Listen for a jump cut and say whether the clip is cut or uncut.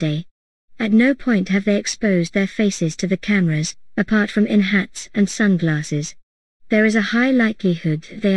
uncut